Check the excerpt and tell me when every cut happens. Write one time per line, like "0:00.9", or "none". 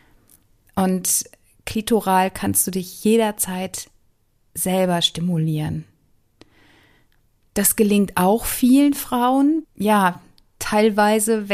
0:07.5
0:09.6